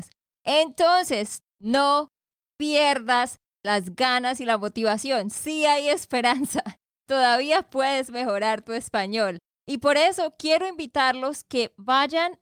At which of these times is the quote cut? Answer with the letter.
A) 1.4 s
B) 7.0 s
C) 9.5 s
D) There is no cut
A